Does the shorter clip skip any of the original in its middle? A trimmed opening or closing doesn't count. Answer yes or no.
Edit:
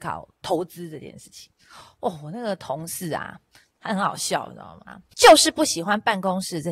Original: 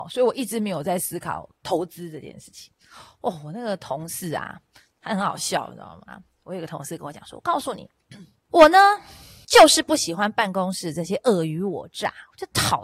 yes